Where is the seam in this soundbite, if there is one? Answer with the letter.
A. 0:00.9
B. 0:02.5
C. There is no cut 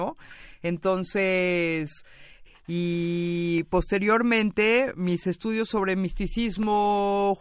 B